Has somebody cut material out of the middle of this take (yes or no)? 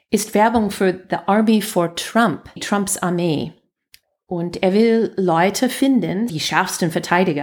yes